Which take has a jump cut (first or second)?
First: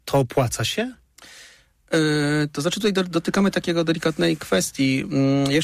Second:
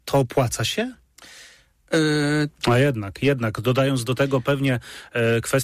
second